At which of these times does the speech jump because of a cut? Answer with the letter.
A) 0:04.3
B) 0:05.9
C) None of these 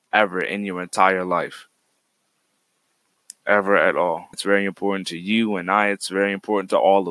A